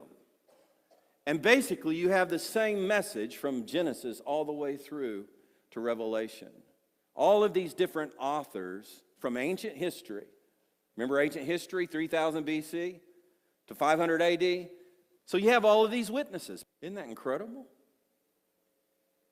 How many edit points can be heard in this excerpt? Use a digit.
2